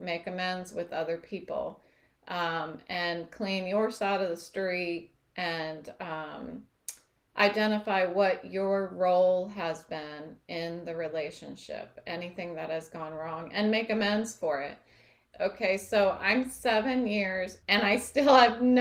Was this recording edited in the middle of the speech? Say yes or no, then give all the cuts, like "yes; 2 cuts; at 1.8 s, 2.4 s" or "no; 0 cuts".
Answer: yes; 2 cuts; at 15.3 s, 17.6 s